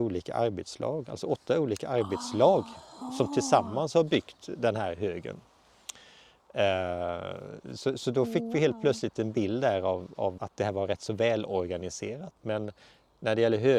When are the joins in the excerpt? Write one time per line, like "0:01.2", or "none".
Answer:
0:10.4
0:12.4